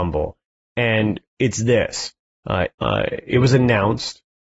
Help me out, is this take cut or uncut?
cut